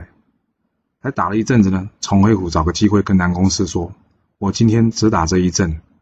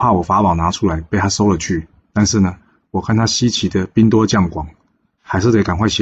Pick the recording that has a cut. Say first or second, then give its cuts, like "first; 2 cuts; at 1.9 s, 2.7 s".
second; 1 cut; at 2.1 s